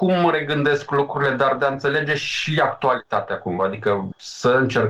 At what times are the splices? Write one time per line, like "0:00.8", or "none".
none